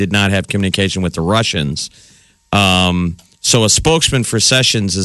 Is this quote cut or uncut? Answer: uncut